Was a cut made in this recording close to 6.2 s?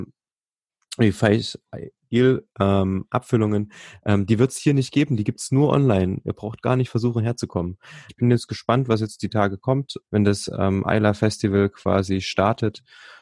no; 2 cuts; at 8.1 s, 10.1 s

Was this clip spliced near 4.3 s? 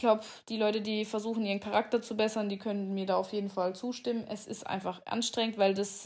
no; 0 cuts

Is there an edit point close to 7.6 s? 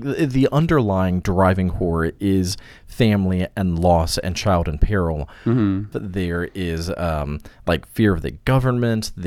no; 1 cut; at 5.9 s

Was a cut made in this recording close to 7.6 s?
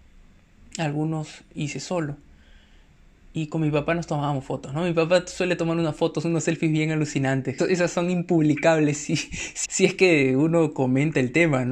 yes; 2 cuts; at 7.6 s, 9.6 s

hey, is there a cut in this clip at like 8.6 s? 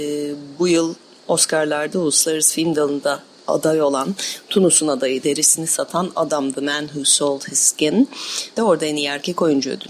yes; 2 cuts; at 5.2 s, 8.6 s

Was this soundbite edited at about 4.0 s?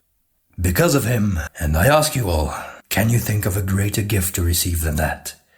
no; 2 cuts; at 1.5 s, 2.8 s

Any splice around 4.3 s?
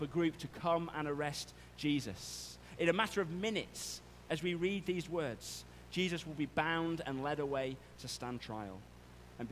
no; 0 cuts

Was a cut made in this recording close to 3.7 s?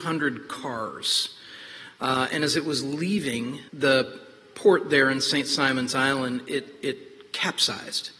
yes; 1 cut; at 3.7 s

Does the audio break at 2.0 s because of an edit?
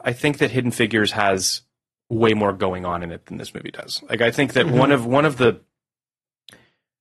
no; 0 cuts

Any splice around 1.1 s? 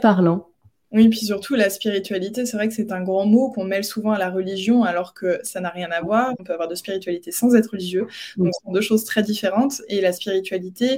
no; 2 cuts; at 6.4 s, 8.5 s

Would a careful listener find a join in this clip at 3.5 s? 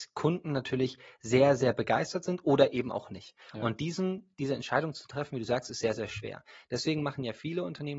no; 0 cuts

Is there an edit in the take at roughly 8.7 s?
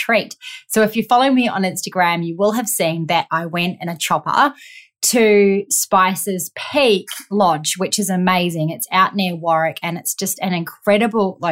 no; 0 cuts

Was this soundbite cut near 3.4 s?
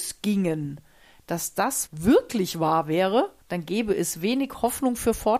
yes; 2 cuts; at 1.9 s, 3.4 s

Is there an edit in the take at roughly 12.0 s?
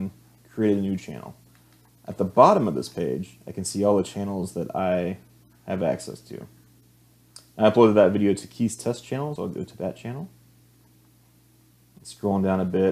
no; 1 cut; at 9.4 s

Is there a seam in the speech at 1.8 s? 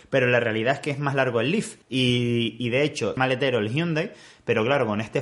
yes; 2 cuts; at 1.8 s, 3.2 s

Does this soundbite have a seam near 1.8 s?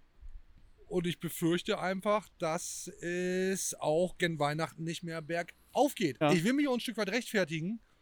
no; 1 cut; at 6.2 s

